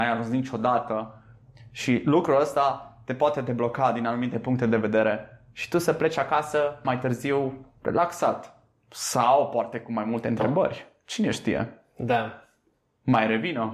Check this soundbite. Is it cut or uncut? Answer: uncut